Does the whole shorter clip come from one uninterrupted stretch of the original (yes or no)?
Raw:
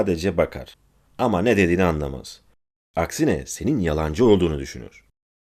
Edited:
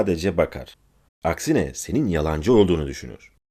no